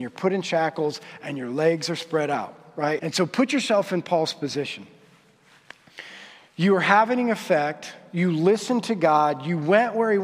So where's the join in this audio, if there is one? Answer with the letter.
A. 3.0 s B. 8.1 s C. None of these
A